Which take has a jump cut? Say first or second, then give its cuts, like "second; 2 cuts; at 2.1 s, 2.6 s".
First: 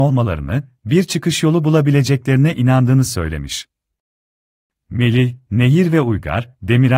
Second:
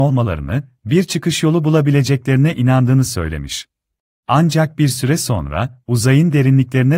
second; 1 cut; at 4.2 s